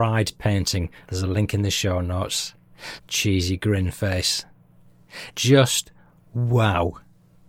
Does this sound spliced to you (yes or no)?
yes